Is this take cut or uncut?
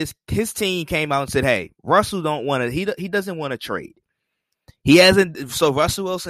uncut